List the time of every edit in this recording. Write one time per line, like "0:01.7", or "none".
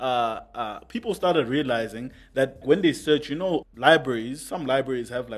0:02.6
0:03.6